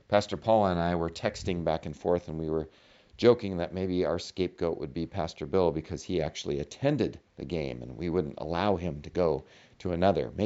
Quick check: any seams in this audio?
no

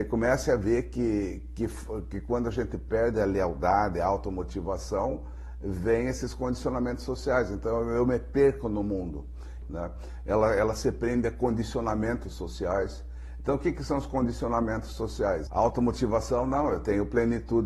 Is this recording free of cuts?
no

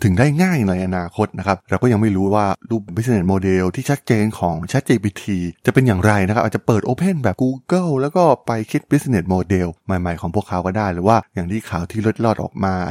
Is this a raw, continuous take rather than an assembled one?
no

